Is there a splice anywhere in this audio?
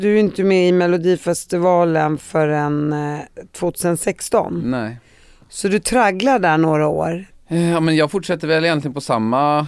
no; 0 cuts

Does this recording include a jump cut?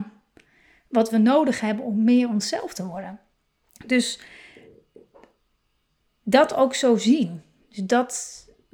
no; 0 cuts

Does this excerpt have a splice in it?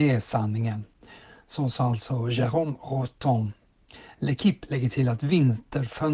no; 0 cuts

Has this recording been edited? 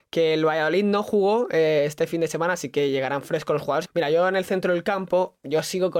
yes; 1 cut; at 3.8 s

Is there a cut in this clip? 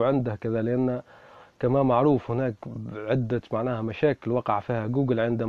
no; 0 cuts

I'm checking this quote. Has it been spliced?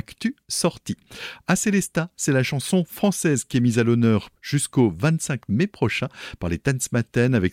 no; 0 cuts

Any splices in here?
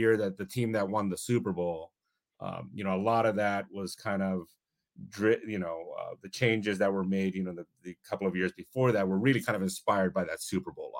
no; 0 cuts

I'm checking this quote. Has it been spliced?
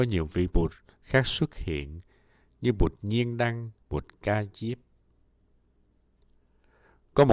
yes; 1 cut; at 3.8 s

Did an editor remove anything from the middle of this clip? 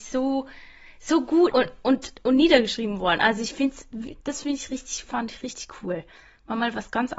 yes; 1 cut; at 1.5 s

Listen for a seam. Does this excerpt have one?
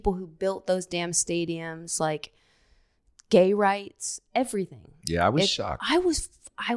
no; 0 cuts

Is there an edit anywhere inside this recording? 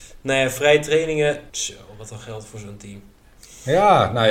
yes; 1 cut; at 1.5 s

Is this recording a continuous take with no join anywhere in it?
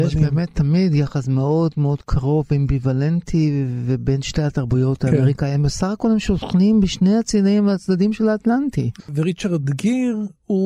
no; 1 cut; at 9.0 s

